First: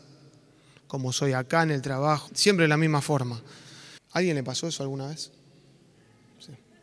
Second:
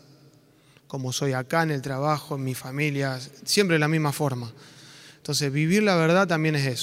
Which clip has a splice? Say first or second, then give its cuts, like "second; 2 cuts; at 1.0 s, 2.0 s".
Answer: first; 2 cuts; at 2.3 s, 4.0 s